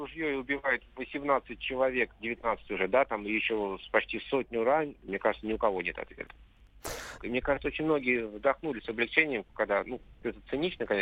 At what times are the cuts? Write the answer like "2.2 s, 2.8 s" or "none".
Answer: 5.1 s, 7.2 s